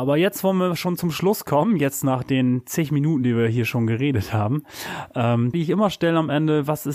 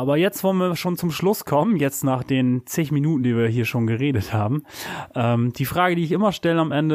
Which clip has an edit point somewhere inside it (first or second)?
first